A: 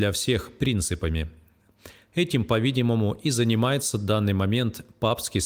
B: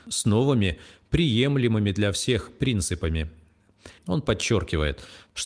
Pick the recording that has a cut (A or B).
B